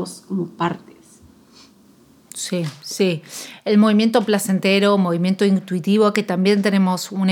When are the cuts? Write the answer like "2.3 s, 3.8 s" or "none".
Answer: none